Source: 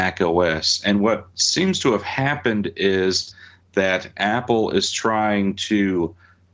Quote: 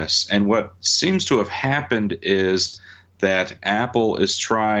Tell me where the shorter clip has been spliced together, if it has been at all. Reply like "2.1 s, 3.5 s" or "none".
none